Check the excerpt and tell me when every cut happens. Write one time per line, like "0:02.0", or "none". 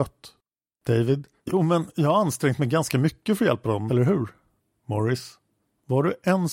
0:01.4
0:03.9